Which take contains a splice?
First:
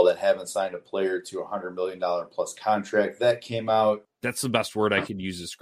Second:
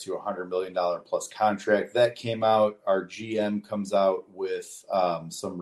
first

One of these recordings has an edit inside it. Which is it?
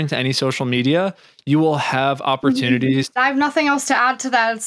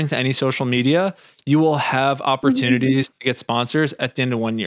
first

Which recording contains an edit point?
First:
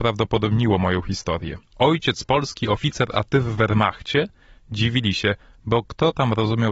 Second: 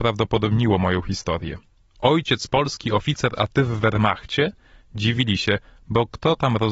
first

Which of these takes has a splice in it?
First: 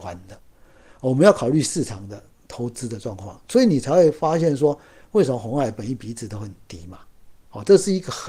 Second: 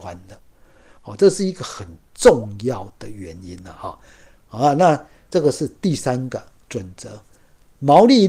second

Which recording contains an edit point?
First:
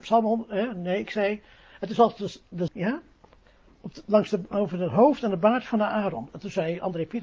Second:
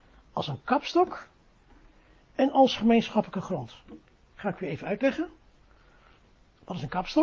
first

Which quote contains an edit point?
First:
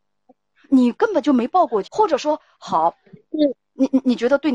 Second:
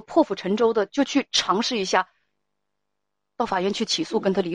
first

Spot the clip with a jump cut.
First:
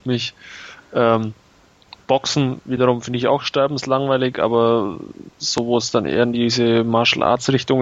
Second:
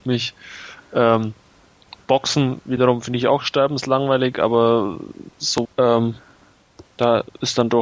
second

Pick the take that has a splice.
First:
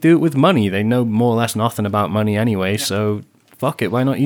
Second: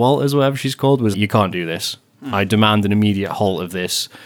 second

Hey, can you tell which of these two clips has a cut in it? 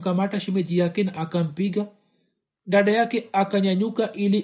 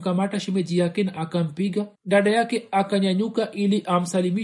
second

